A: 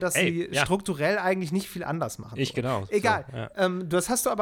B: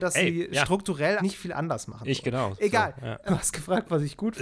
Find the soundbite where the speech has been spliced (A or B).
B